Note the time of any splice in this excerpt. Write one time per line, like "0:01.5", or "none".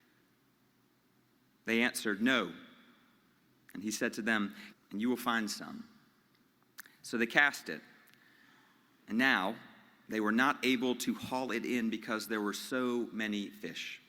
0:04.7

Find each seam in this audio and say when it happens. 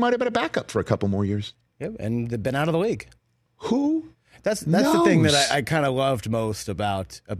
none

